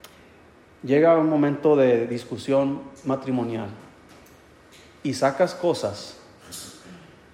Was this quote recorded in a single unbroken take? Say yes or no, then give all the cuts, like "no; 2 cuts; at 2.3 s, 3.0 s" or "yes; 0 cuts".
yes; 0 cuts